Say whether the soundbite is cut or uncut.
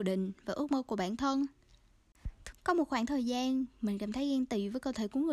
cut